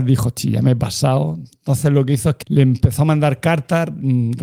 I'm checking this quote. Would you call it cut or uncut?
cut